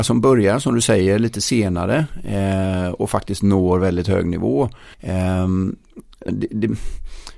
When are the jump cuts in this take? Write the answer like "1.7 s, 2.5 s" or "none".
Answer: 4.9 s, 6.3 s